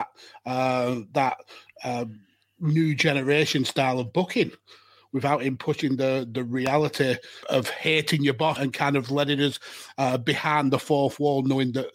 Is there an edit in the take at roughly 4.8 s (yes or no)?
no